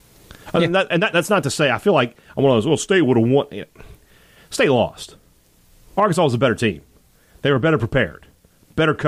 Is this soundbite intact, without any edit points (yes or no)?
yes